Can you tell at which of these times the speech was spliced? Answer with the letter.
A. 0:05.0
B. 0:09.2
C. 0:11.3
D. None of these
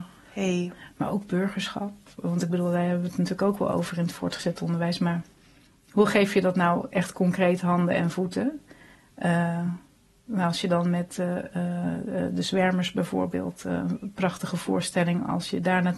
D